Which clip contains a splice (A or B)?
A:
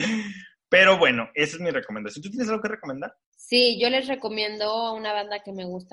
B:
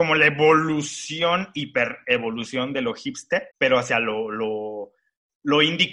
B